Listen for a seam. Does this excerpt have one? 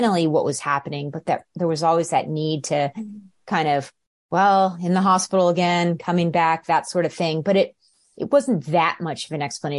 no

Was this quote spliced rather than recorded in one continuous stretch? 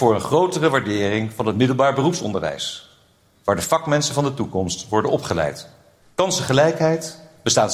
yes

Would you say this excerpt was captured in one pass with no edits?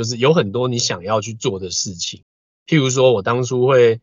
yes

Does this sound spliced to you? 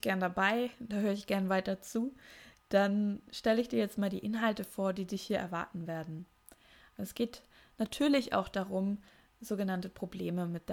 no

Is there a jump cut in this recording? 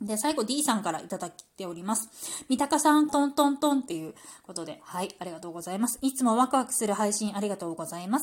yes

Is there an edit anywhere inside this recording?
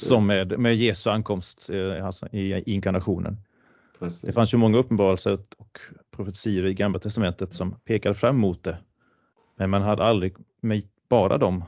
no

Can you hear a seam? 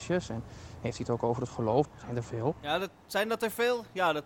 yes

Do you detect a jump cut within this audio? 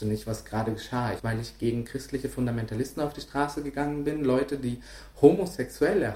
yes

